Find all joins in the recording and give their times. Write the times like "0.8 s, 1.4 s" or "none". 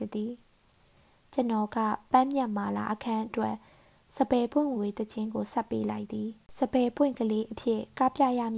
4.7 s